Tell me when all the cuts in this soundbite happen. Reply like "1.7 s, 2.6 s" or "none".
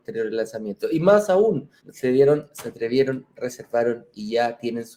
1.8 s